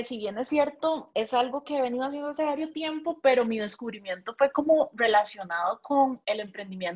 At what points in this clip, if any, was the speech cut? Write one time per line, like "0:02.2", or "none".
none